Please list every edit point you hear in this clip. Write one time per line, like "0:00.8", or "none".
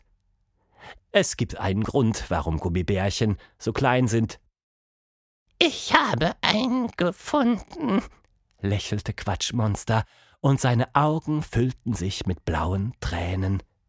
0:01.0